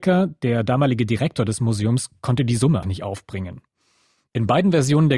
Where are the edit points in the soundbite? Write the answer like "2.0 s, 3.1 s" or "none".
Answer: 2.8 s